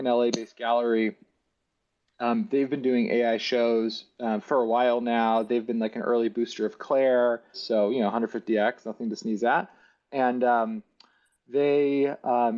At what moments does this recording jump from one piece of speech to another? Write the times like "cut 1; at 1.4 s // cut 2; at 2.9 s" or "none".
cut 1; at 7.5 s